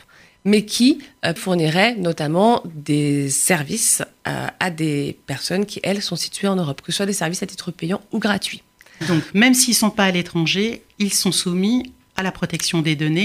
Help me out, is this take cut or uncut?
cut